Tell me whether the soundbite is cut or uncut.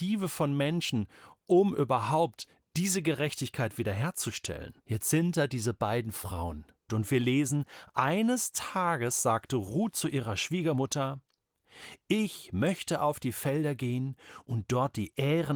cut